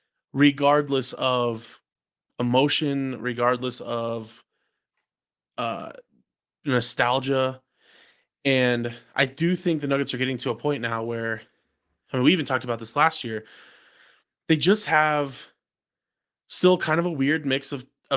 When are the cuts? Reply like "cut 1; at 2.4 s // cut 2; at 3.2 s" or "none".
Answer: none